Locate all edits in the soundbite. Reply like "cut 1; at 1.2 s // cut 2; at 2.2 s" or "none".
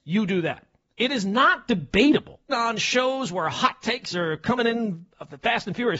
cut 1; at 0.9 s // cut 2; at 2.5 s